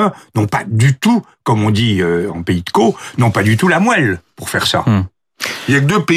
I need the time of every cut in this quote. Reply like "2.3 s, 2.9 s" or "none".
none